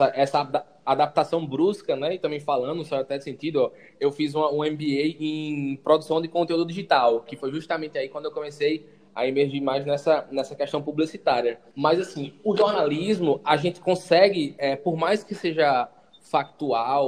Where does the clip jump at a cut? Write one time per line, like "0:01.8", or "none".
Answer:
0:11.7